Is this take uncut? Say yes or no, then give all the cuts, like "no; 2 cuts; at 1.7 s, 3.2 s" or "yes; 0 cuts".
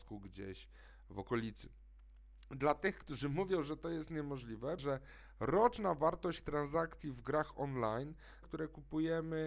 no; 2 cuts; at 4.8 s, 8.4 s